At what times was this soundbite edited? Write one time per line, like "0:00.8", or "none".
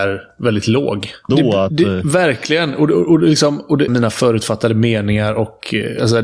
0:01.3
0:03.9